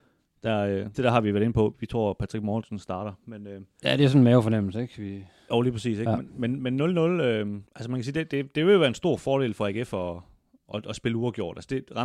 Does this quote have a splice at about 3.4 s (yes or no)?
no